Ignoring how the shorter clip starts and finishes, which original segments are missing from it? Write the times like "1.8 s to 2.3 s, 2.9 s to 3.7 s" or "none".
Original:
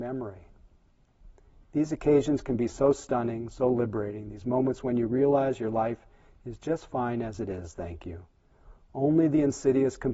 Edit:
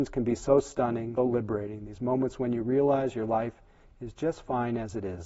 3.5 s to 3.6 s

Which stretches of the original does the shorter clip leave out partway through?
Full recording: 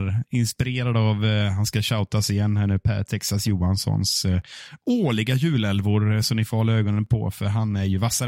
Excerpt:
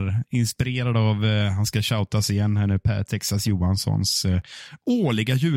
none

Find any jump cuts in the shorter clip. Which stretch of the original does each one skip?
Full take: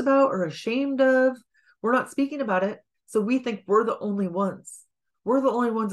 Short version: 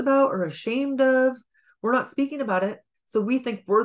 none

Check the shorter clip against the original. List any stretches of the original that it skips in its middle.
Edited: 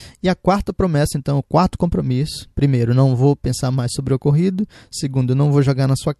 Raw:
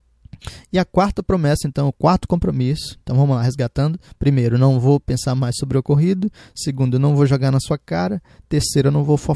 3.0 s to 4.2 s

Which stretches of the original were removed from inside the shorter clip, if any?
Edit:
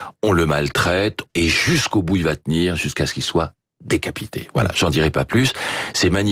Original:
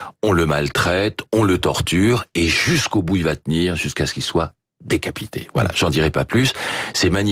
1.3 s to 2.3 s

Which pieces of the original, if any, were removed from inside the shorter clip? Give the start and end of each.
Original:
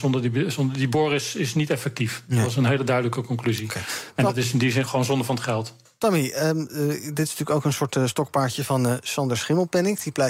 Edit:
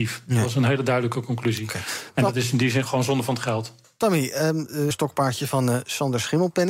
6.9 s to 8.1 s

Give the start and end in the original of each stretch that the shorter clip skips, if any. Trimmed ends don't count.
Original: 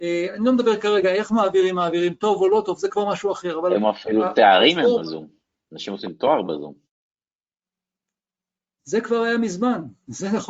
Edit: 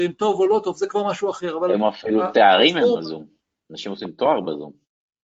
none

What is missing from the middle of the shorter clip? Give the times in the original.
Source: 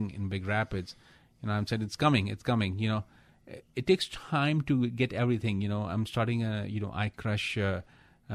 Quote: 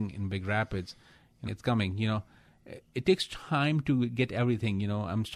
1.5 s to 2.3 s

